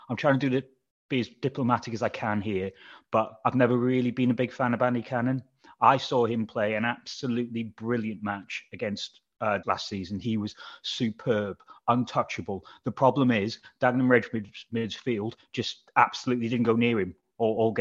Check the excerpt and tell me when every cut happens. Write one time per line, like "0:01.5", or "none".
0:09.6